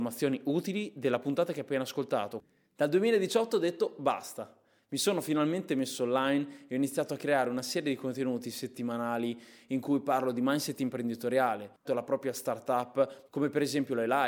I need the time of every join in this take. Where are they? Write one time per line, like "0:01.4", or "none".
0:11.8
0:13.3